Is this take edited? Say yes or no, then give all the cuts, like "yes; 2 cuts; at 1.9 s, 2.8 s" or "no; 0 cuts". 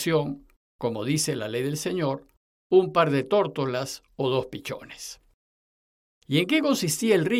yes; 1 cut; at 6.2 s